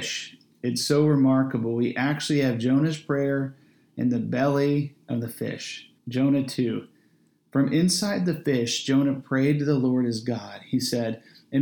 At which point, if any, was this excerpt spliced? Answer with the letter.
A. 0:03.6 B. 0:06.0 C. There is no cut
B